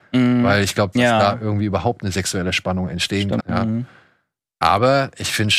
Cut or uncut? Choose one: cut